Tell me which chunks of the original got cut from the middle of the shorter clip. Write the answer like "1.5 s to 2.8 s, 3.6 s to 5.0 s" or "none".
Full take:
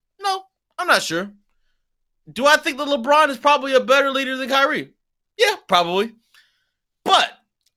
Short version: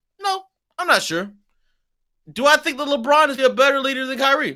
3.4 s to 3.7 s